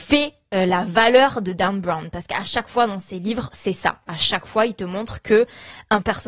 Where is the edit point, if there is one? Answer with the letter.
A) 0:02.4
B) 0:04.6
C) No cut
C